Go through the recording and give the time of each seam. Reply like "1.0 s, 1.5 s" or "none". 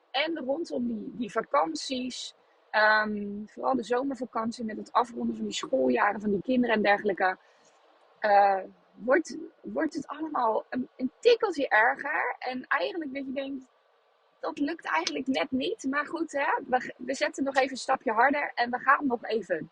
none